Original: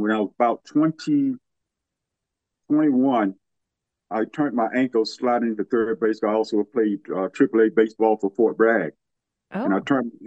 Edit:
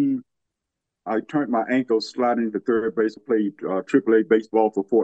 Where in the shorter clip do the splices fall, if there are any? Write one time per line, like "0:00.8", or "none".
0:00.9
0:03.2